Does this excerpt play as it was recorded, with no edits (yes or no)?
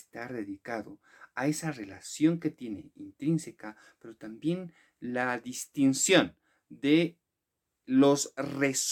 yes